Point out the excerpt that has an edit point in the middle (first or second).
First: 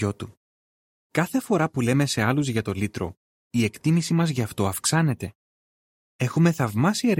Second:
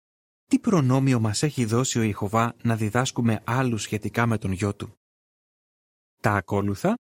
first